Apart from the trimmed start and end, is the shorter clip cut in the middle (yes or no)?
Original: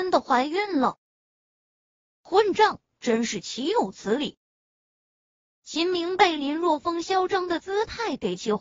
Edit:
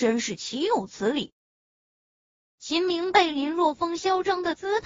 no